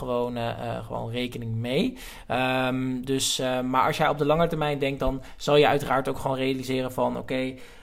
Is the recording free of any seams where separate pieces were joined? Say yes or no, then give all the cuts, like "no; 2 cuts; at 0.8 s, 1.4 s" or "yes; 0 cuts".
yes; 0 cuts